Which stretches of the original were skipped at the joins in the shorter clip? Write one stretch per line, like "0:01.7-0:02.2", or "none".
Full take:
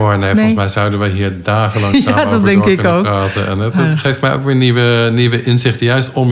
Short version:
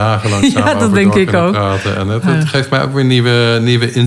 none